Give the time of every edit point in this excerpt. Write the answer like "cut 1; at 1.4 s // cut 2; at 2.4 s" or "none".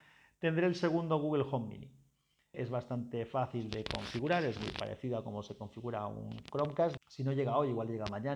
cut 1; at 2.5 s // cut 2; at 7.0 s